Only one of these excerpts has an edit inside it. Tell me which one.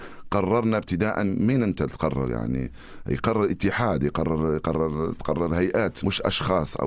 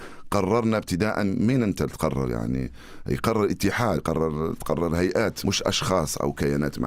second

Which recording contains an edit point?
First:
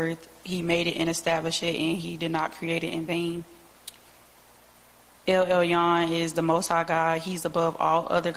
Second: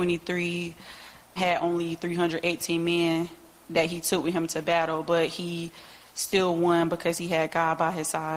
second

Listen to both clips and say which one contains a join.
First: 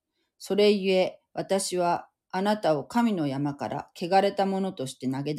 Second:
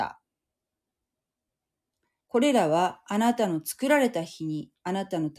second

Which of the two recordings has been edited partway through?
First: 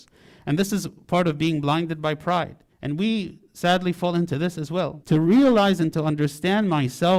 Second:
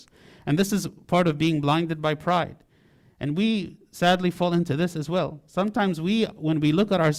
first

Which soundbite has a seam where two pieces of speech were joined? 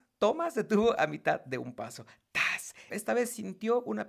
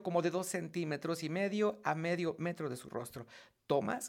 first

